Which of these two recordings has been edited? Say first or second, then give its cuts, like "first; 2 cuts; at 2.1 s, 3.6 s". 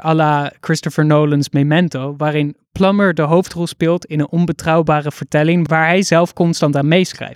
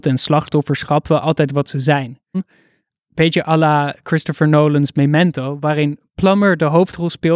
second; 1 cut; at 2.3 s